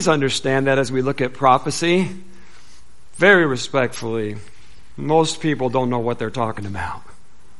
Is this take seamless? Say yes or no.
yes